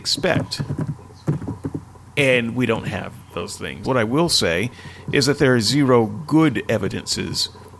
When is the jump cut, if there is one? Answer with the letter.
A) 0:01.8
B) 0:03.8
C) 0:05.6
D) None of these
B